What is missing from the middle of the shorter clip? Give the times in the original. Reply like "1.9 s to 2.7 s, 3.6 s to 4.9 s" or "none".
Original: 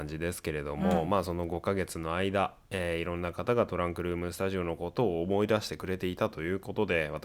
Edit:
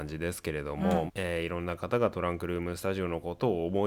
1.1 s to 2.6 s